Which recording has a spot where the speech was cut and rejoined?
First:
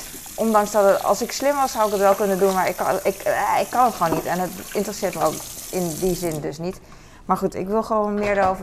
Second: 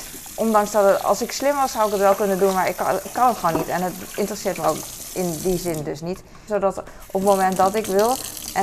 second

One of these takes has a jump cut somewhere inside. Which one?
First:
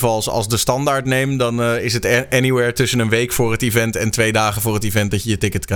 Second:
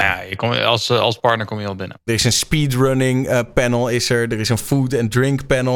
second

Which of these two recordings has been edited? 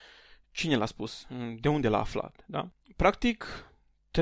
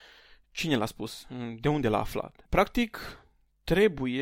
second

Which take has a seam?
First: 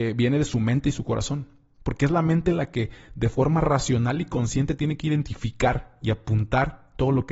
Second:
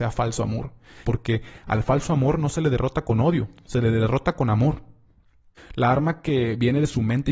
second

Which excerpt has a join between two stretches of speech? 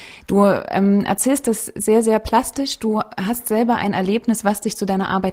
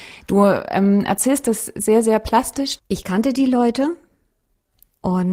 second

